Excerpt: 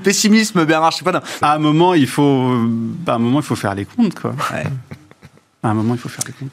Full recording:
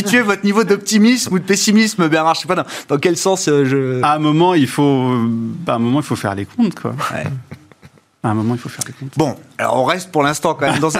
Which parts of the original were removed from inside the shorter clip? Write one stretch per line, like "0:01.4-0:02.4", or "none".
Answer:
0:02.8-0:04.0